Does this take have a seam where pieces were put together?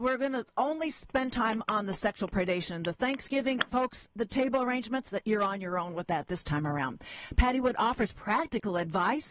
yes; 1 cut; at 4.1 s

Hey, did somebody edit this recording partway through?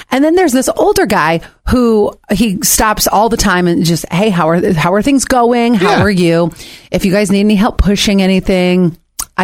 no; 0 cuts

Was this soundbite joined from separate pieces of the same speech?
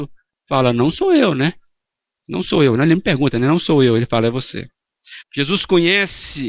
yes; 1 cut; at 5.2 s

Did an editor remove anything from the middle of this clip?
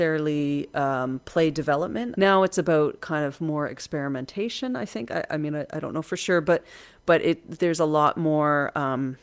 yes; 2 cuts; at 2.1 s, 5.3 s

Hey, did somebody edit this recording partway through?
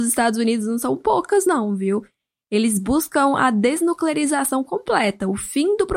no; 0 cuts

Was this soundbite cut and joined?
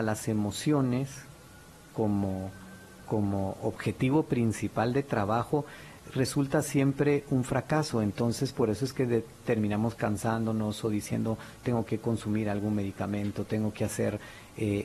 no; 0 cuts

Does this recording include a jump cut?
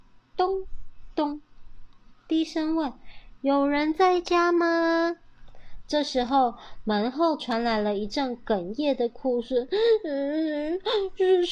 yes; 1 cut; at 1.1 s

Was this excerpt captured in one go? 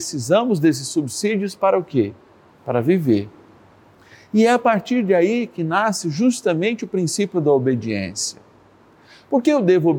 yes; 0 cuts

